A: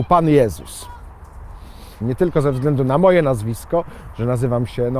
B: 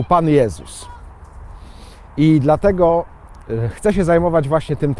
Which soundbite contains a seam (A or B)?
A